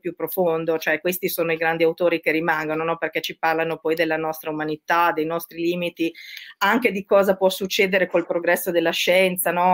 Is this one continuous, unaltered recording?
yes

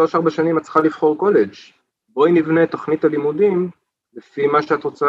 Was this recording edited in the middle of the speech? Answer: no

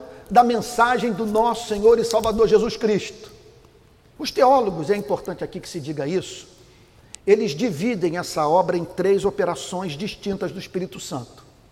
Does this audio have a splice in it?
yes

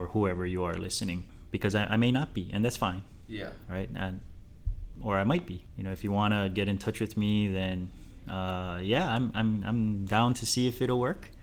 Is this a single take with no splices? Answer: yes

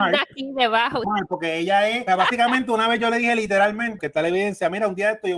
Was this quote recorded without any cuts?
no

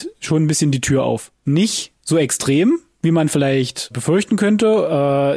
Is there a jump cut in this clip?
yes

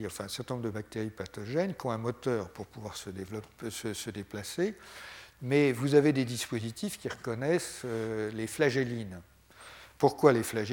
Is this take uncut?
no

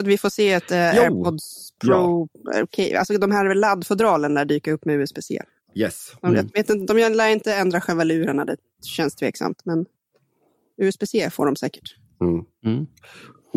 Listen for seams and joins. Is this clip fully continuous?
yes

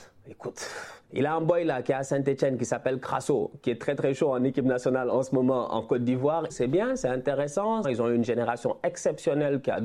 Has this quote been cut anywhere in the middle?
yes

